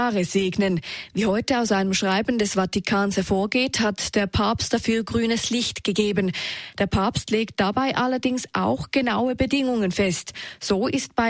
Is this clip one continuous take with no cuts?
yes; 0 cuts

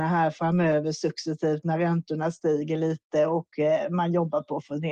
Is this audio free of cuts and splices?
yes; 0 cuts

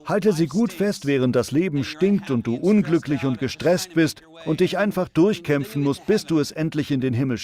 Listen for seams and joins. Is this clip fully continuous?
yes; 0 cuts

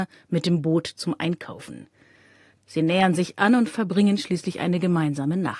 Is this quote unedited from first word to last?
no; 1 cut; at 2.6 s

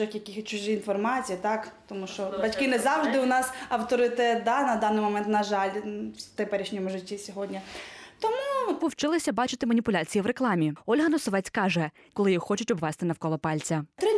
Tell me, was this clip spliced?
yes; 2 cuts; at 8.8 s, 12.1 s

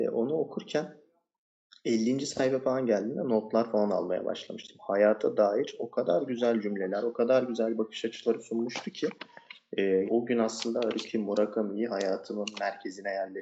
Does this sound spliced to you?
yes; 1 cut; at 10.0 s

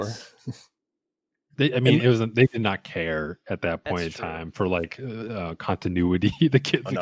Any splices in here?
no; 0 cuts

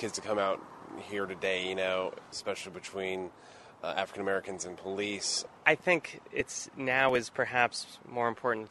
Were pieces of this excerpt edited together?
yes; 1 cut; at 2.3 s

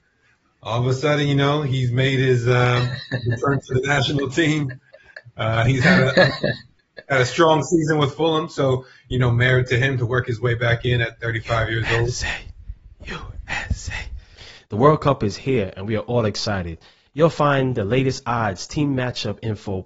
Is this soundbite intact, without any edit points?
no; 1 cut; at 14.7 s

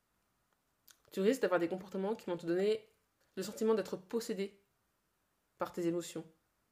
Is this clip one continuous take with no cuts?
no; 1 cut; at 3.2 s

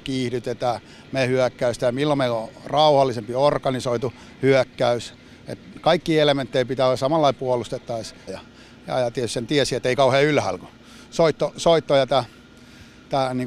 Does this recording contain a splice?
yes; 1 cut; at 8.3 s

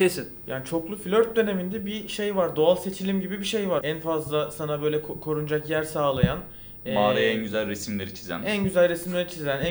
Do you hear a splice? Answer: yes; 1 cut; at 3.8 s

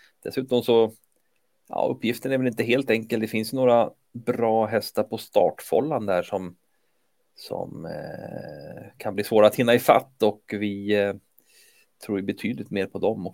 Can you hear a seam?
no; 0 cuts

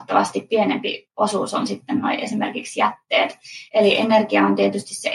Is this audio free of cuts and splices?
yes; 0 cuts

